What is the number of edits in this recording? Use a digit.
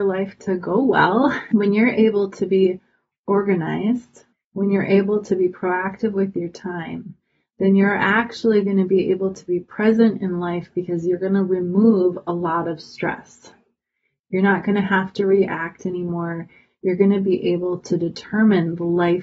0